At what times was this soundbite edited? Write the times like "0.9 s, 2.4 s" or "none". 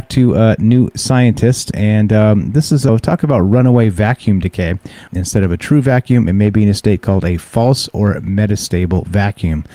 2.9 s, 5.1 s